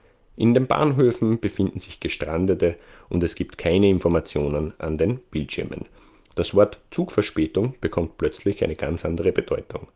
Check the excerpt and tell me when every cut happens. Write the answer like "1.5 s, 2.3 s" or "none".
none